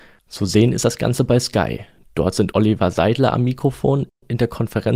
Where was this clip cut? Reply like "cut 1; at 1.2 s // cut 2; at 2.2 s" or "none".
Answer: none